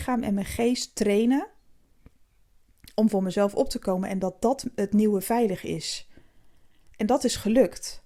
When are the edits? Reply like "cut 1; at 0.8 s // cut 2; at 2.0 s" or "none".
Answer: none